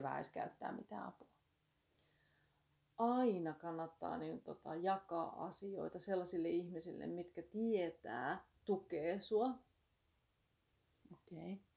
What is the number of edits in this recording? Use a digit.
1